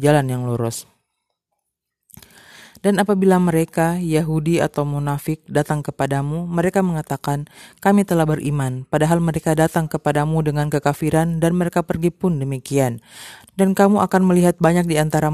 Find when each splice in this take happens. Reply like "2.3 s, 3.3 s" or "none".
13.5 s